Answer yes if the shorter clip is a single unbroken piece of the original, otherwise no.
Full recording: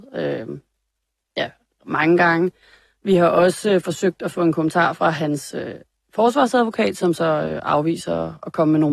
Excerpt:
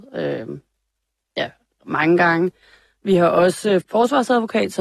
no